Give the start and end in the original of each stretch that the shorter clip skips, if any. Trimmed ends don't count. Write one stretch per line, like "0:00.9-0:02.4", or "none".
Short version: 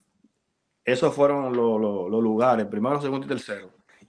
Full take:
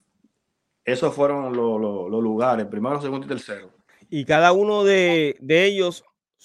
none